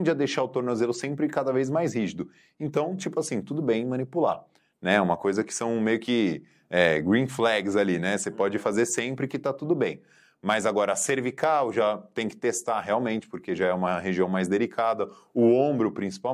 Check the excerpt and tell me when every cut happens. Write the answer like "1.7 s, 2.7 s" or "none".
none